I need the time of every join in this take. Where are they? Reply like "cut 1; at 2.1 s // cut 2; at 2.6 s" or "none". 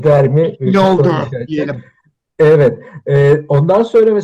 none